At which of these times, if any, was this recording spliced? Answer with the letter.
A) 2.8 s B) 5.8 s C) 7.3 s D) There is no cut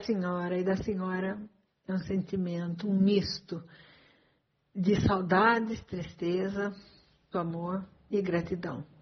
C